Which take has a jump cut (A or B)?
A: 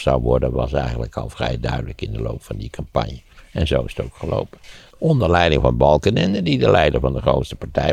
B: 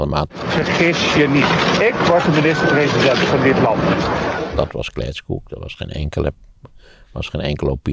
A